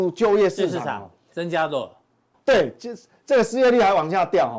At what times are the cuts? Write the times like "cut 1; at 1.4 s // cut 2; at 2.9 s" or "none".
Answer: cut 1; at 2.3 s